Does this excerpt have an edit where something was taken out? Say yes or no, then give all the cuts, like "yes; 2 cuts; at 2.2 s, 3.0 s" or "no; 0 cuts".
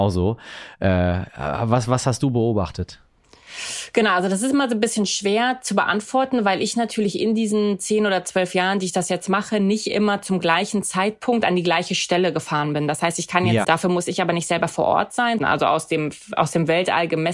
yes; 2 cuts; at 13.6 s, 15.4 s